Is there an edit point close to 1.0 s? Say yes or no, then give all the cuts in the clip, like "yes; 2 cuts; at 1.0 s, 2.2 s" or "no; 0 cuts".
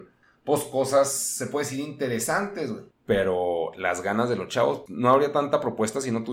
no; 2 cuts; at 2.9 s, 4.9 s